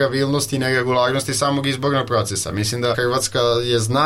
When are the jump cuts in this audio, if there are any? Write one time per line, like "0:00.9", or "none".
0:02.9